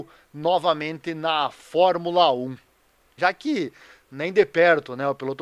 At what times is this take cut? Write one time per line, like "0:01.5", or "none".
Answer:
0:03.2